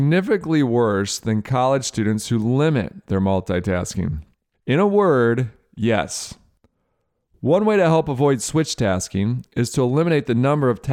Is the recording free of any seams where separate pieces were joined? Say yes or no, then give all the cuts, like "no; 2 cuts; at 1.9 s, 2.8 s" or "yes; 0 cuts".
no; 1 cut; at 4.5 s